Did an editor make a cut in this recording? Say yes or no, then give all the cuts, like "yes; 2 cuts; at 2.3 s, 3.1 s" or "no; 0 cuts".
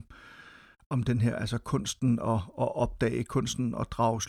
no; 0 cuts